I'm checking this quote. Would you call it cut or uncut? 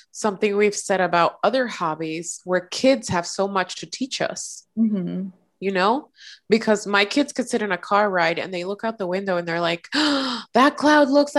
uncut